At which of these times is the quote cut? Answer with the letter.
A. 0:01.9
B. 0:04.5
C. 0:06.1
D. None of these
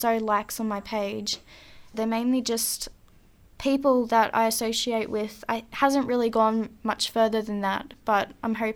A